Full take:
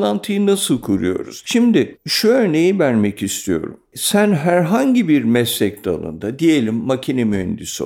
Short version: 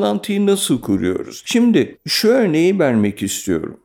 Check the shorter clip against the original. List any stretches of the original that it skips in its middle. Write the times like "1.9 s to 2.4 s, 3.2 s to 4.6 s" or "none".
none